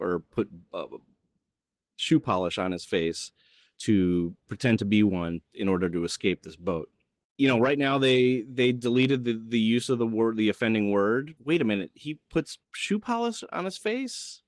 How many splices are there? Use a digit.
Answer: 3